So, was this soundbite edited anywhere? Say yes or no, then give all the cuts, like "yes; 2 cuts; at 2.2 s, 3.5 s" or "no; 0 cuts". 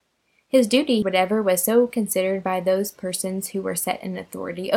yes; 1 cut; at 1.0 s